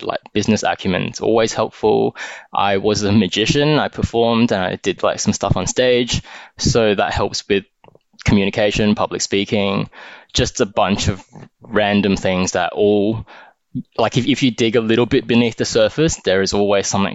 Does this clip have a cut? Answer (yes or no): no